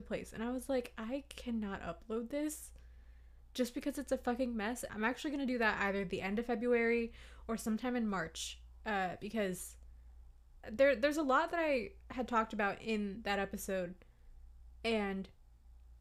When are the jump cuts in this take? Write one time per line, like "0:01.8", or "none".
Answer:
0:04.9
0:10.6